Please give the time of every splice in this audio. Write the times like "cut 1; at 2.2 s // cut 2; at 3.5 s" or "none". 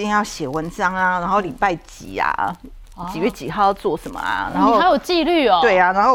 none